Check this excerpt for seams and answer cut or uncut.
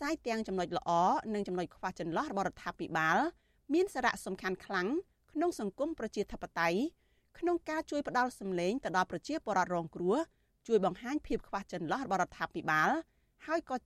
uncut